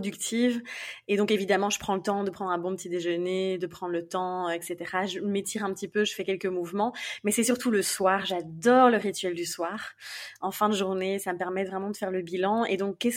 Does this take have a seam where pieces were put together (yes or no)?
no